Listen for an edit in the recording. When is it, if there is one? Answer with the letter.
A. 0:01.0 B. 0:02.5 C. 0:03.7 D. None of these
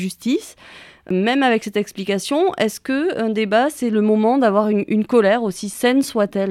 D